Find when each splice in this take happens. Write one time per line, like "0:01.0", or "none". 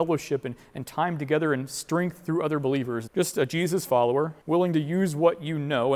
0:03.1
0:04.4

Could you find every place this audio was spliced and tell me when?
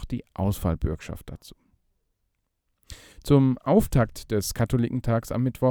none

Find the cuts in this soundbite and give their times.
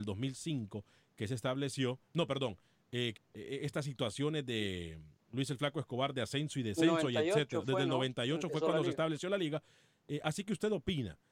0:03.1

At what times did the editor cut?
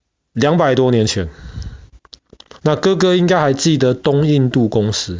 0:02.5

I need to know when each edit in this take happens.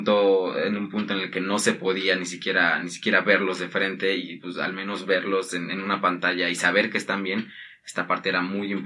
none

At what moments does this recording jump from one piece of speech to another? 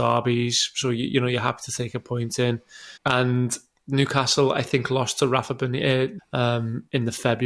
0:03.0
0:06.2

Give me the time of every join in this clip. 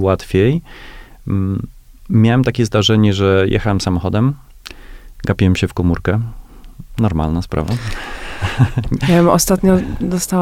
none

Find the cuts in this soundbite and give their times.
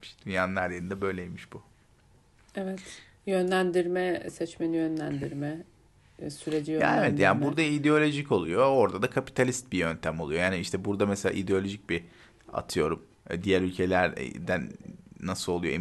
none

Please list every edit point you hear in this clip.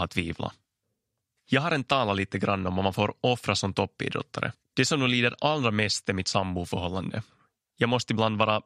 0:04.6

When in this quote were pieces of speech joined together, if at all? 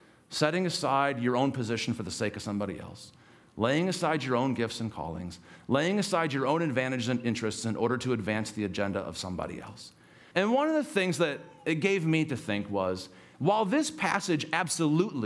0:10.3

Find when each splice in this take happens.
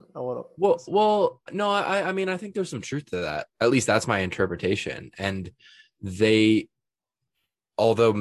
0:01.5
0:03.5

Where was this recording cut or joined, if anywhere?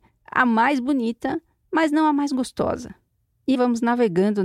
0:03.5

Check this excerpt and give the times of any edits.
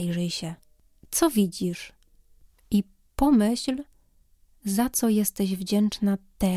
none

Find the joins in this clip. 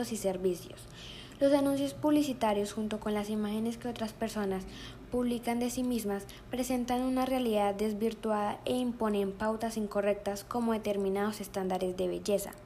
none

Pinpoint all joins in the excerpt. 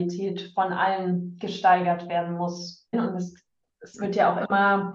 0:02.9

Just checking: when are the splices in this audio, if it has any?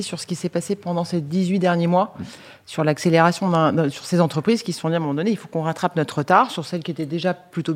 none

